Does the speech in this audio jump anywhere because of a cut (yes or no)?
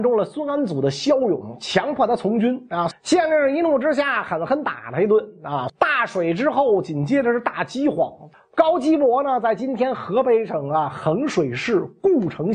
yes